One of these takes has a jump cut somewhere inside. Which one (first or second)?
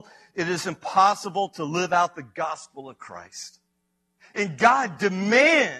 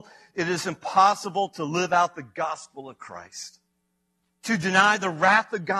first